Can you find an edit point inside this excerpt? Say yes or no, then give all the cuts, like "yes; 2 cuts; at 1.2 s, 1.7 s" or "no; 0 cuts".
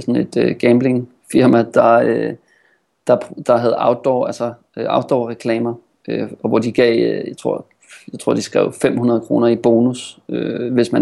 no; 0 cuts